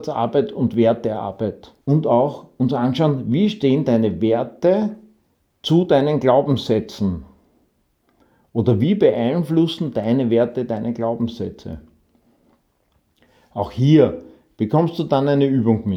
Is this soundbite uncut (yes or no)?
no